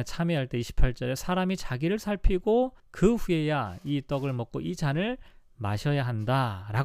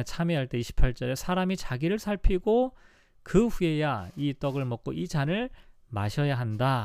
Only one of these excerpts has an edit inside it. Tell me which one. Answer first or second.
first